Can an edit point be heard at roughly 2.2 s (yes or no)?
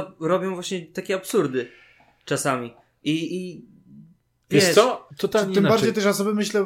no